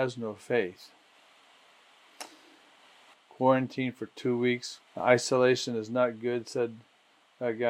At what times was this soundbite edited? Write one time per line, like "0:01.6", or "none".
0:03.1
0:04.9